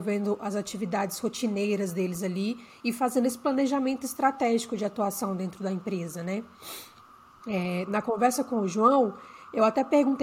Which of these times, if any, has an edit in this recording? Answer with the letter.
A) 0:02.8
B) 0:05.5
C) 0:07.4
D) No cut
C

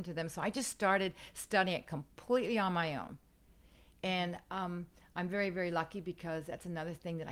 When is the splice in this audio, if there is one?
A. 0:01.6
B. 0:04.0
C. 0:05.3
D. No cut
D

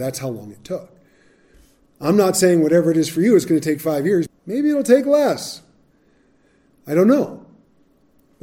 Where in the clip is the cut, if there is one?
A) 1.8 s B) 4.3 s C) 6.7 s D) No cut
B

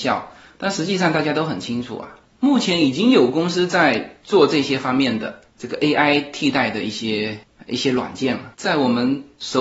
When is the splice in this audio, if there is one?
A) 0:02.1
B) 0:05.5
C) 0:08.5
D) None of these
C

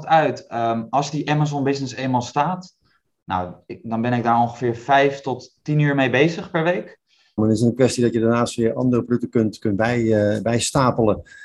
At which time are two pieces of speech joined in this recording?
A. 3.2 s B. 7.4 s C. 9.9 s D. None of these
B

